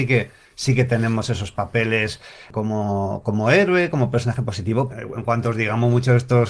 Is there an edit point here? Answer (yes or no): yes